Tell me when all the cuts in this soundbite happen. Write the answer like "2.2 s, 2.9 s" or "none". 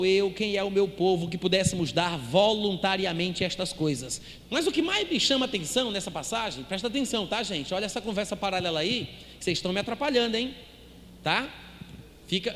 4.5 s